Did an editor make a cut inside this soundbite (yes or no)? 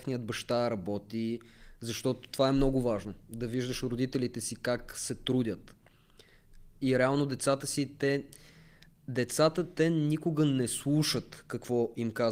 no